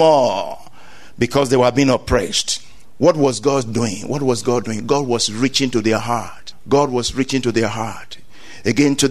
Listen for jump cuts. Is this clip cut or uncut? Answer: uncut